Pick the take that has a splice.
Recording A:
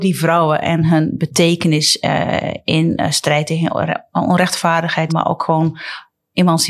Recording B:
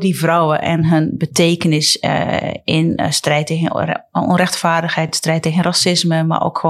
A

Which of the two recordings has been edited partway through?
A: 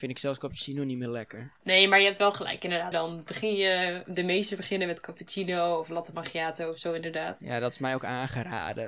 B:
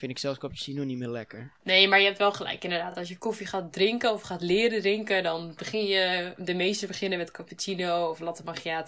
A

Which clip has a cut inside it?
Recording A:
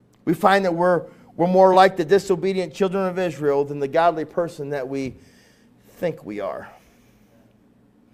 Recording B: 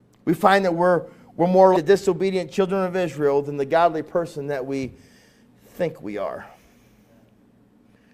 B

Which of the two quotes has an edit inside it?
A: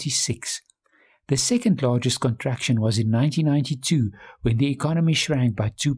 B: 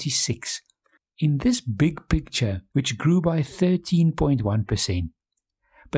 B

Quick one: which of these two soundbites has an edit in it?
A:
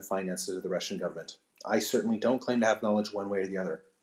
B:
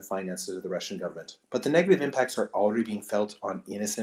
B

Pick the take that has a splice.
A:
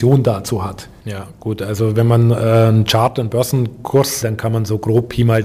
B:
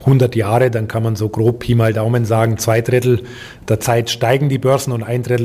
A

